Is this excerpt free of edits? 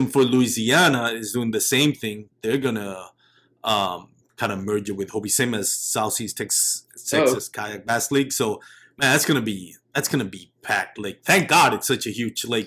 yes; 0 cuts

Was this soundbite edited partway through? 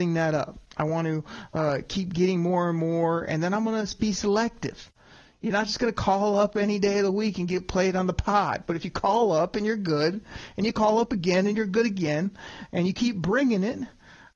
yes; 1 cut; at 4.1 s

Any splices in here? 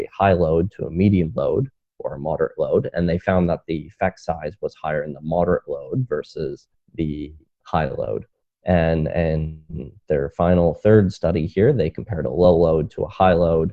no; 0 cuts

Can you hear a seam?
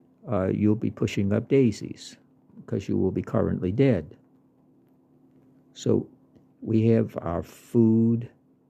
yes; 1 cut; at 6.5 s

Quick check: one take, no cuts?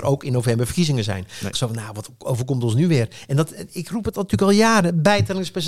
no; 1 cut; at 1.5 s

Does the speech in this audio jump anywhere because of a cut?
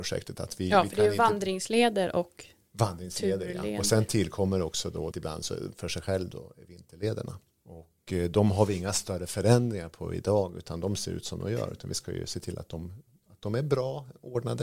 yes; 1 cut; at 5.1 s

